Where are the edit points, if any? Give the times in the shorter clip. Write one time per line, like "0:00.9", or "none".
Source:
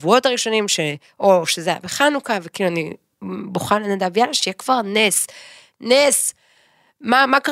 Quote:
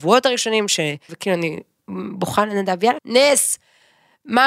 0:01.1
0:03.0